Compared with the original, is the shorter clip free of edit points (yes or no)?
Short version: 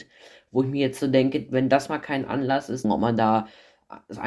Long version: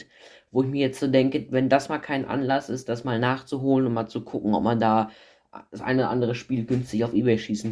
no